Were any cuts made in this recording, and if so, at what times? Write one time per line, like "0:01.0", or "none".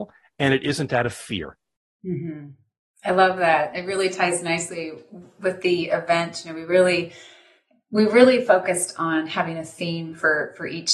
none